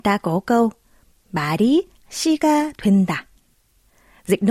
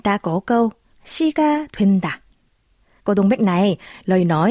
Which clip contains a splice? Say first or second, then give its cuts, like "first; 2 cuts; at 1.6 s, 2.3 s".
second; 2 cuts; at 0.9 s, 3.0 s